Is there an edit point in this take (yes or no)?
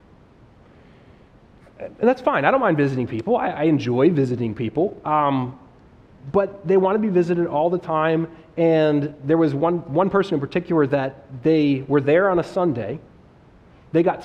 no